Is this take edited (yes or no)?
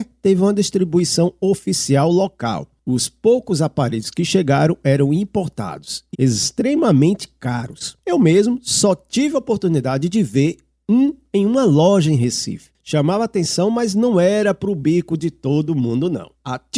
yes